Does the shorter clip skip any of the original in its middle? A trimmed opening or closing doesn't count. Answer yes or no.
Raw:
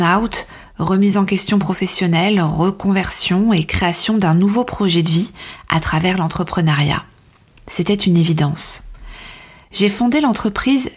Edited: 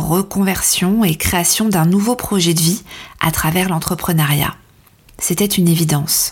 no